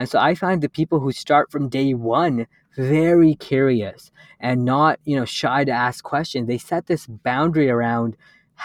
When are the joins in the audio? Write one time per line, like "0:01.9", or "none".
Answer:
none